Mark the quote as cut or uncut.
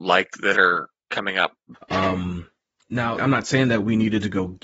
cut